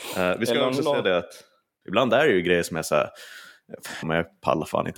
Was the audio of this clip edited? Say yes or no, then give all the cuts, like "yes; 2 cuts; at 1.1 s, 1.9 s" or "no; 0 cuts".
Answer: yes; 2 cuts; at 1.8 s, 4.0 s